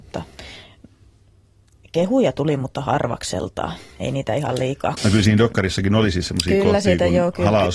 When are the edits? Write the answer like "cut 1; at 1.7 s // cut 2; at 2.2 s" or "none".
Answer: cut 1; at 5.0 s